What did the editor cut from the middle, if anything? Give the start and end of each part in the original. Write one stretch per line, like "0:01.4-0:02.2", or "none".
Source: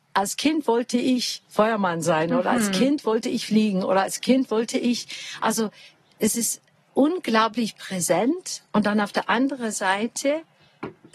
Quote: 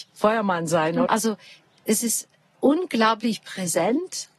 0:02.4-0:05.4